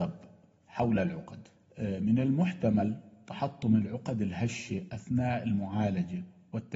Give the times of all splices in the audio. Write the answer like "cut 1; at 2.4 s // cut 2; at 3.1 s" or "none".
none